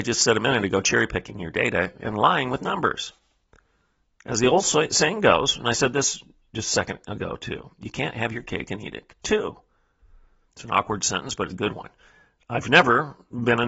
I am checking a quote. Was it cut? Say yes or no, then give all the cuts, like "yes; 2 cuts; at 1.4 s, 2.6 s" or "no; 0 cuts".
yes; 2 cuts; at 10.5 s, 11.5 s